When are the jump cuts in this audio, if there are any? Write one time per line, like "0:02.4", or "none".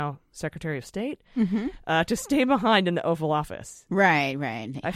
0:03.9